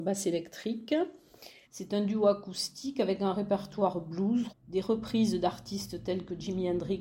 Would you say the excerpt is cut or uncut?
cut